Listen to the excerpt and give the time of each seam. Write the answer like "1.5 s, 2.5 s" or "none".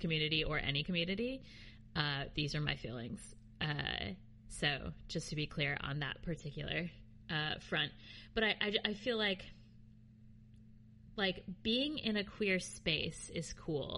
none